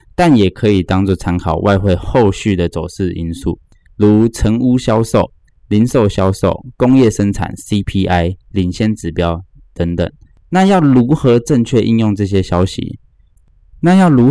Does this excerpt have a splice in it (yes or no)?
no